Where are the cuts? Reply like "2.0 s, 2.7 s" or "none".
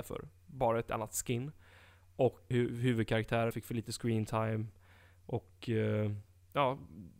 2.5 s, 3.5 s